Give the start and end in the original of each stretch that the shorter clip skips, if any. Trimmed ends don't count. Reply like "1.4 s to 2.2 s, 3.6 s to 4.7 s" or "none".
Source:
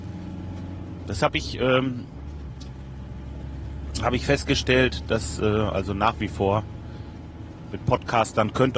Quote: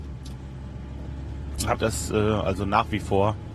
4.1 s to 5.0 s